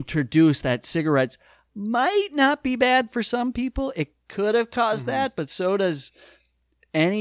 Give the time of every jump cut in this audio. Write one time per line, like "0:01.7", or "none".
none